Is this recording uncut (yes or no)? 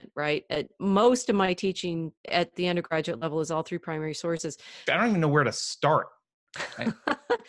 no